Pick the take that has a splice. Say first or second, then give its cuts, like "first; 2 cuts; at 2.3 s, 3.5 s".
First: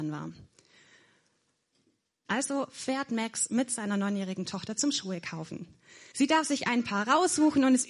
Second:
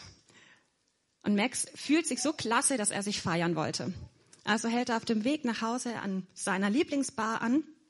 first; 2 cuts; at 2.2 s, 6.1 s